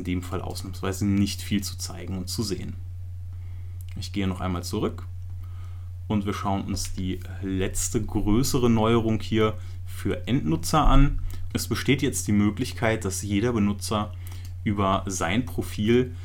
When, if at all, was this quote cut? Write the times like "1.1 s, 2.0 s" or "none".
11.5 s

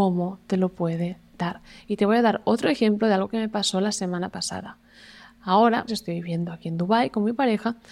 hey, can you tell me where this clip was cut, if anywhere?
5.9 s

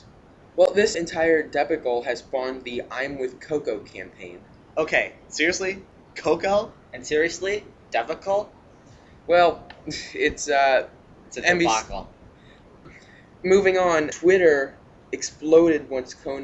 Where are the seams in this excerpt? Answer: 0.9 s

